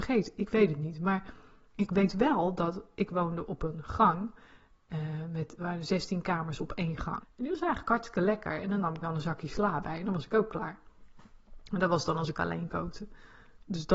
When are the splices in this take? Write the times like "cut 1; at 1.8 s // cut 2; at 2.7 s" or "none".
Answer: cut 1; at 5.6 s // cut 2; at 7.2 s